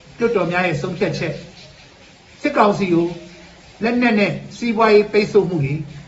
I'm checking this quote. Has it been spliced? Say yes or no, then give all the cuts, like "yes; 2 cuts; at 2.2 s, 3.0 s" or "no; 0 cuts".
no; 0 cuts